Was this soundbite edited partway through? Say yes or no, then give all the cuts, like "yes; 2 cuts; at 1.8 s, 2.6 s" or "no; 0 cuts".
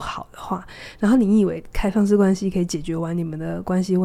no; 0 cuts